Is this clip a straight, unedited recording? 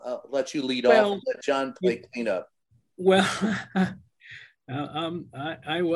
yes; 0 cuts

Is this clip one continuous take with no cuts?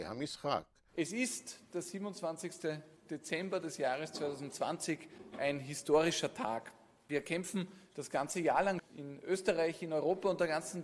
no; 1 cut; at 8.8 s

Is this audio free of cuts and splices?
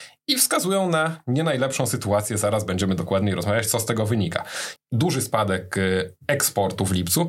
no; 1 cut; at 4.8 s

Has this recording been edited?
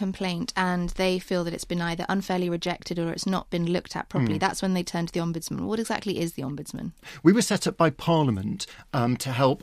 no; 0 cuts

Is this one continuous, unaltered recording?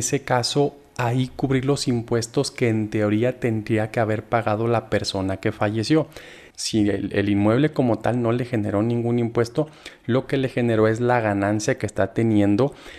no; 1 cut; at 6.5 s

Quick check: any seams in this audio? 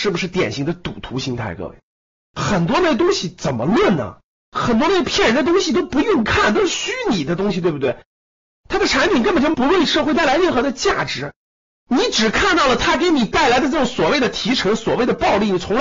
no; 0 cuts

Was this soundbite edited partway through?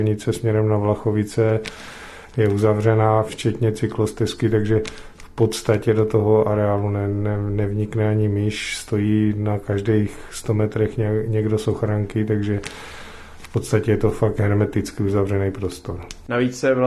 no; 0 cuts

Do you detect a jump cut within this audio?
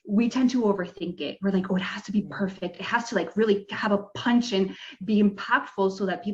no; 0 cuts

